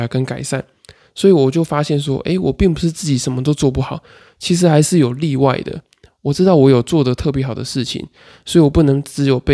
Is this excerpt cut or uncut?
uncut